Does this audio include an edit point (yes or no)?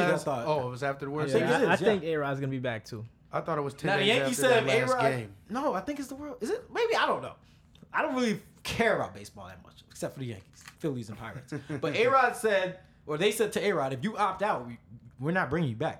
yes